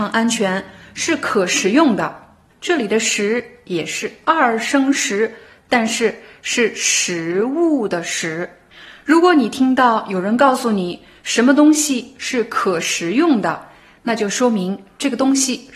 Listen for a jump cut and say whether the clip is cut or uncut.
cut